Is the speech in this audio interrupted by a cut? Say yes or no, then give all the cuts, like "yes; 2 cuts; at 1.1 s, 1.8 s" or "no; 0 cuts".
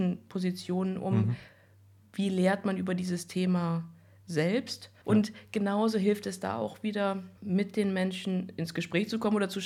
yes; 2 cuts; at 5.0 s, 7.4 s